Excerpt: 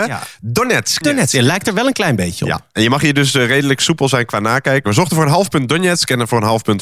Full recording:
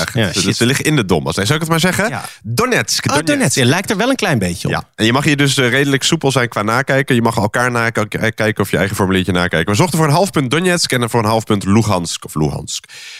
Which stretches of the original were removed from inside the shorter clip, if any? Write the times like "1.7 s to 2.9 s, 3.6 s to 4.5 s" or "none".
3.0 s to 3.2 s, 7.1 s to 9.7 s